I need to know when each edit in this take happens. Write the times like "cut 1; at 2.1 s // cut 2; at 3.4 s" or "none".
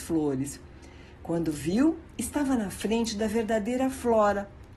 none